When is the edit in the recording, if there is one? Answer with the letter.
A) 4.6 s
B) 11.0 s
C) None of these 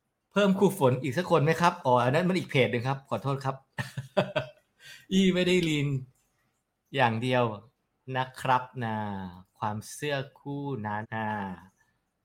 B